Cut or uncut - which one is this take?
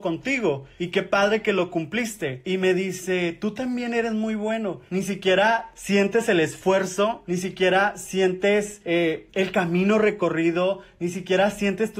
cut